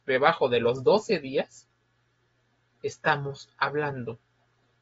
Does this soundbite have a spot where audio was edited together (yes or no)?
no